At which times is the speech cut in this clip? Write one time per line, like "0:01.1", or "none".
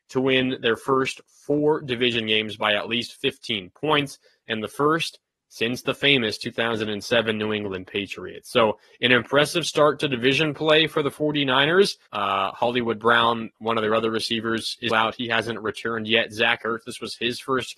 0:12.1
0:14.9